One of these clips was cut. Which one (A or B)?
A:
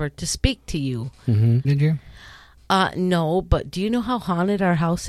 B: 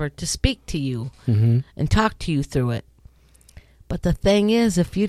A